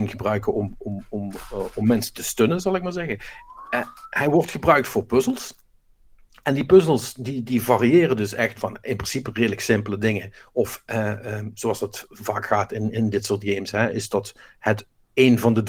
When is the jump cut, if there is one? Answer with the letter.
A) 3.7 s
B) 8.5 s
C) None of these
B